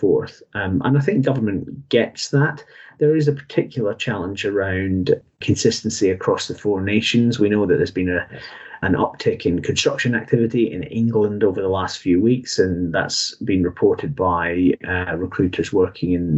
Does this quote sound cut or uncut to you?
uncut